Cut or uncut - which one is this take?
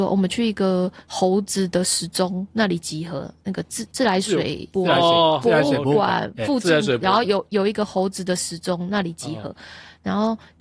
uncut